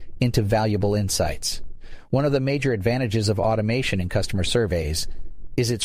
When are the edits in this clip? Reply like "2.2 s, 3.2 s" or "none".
none